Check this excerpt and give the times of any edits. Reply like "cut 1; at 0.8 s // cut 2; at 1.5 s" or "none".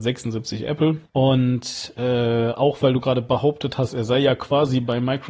cut 1; at 1.0 s